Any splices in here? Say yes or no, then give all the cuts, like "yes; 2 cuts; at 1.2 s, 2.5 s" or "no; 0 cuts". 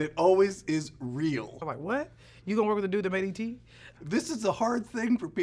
yes; 2 cuts; at 1.6 s, 4.0 s